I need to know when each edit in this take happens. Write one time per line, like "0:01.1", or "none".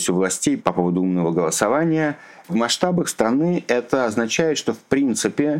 0:02.4